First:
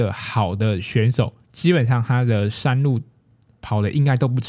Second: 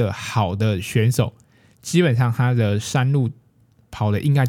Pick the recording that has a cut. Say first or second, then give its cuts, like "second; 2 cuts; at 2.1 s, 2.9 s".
first; 1 cut; at 1.4 s